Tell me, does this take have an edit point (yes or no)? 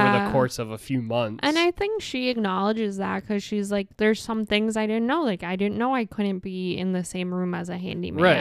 no